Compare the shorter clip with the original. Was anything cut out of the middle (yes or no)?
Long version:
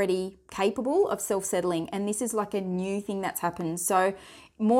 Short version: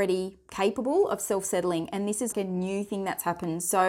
yes